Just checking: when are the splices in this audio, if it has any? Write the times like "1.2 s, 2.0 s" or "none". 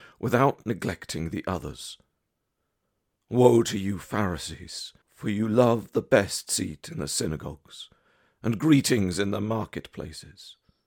5.0 s